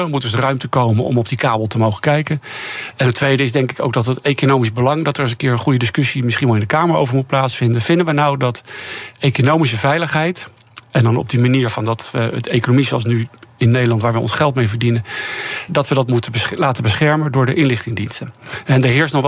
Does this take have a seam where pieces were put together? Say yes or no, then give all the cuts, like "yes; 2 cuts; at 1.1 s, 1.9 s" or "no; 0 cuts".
yes; 1 cut; at 15.7 s